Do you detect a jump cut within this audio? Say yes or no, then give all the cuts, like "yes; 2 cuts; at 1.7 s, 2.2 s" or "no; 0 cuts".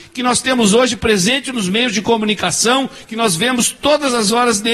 yes; 1 cut; at 3.1 s